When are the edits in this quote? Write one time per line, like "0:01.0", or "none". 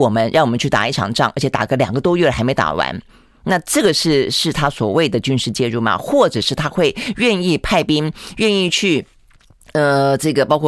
none